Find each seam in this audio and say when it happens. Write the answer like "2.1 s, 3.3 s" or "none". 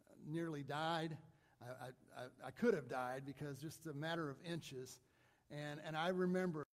none